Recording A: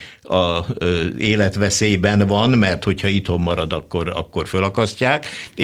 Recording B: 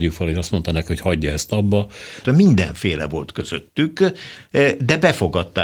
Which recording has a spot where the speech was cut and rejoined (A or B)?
B